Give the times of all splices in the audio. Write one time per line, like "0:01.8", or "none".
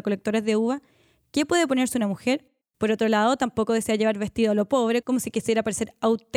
0:02.6
0:05.0